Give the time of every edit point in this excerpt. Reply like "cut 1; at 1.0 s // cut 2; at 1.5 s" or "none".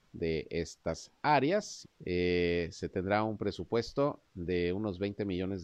cut 1; at 1.8 s